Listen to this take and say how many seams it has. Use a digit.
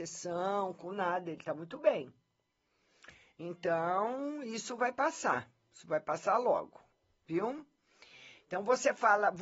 0